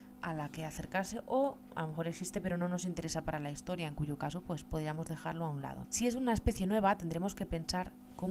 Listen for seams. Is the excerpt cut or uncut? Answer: cut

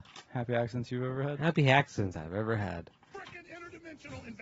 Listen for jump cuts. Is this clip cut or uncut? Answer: cut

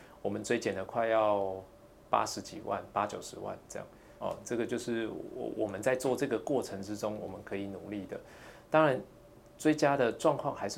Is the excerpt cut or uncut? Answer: cut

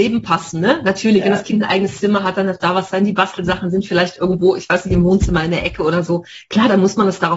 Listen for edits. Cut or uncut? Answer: uncut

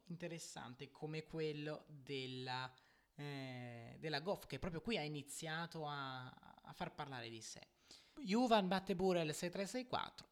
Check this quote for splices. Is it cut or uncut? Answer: cut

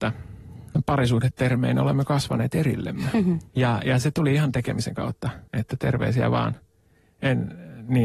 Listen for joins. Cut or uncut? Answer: cut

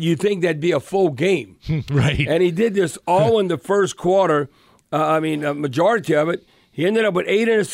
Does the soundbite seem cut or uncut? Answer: uncut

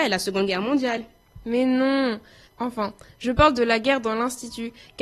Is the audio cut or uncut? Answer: uncut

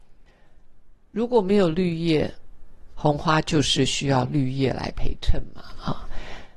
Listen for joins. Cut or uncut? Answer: cut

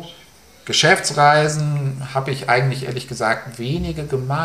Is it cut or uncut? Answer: uncut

